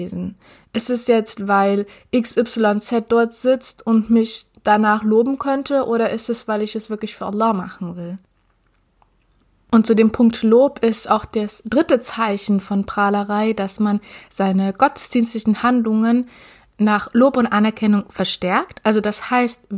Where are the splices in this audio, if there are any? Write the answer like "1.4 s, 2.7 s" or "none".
none